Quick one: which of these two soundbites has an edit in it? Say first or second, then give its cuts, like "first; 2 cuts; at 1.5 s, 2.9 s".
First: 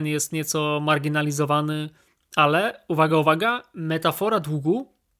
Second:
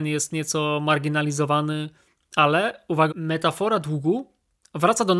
second; 1 cut; at 3.1 s